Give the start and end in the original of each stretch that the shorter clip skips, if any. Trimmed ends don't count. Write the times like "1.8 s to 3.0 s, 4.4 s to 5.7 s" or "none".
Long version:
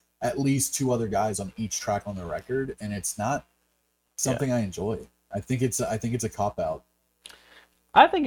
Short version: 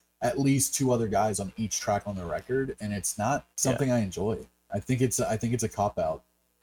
3.5 s to 4.1 s